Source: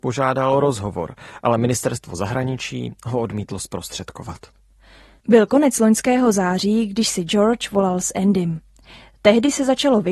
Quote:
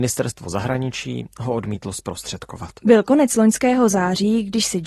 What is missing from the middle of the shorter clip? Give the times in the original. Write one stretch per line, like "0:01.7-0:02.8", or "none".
0:04.4-0:05.2